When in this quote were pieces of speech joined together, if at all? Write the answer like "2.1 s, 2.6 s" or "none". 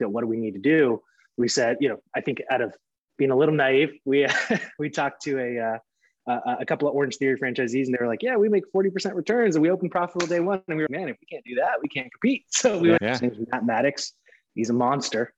10.9 s, 13.0 s